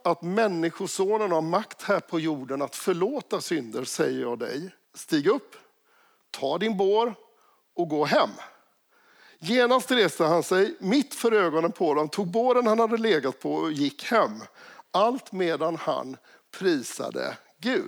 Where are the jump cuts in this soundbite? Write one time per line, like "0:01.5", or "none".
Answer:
0:04.8